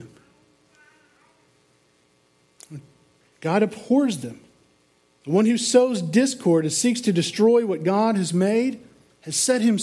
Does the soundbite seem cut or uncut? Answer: uncut